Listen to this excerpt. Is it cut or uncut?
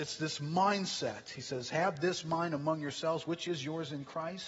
uncut